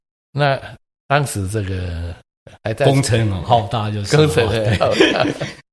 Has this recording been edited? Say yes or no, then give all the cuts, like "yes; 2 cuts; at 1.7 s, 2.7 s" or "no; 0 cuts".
no; 0 cuts